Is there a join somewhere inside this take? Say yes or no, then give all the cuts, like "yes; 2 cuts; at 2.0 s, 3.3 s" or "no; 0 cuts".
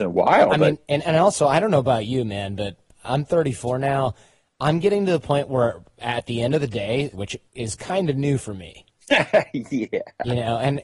yes; 1 cut; at 7.1 s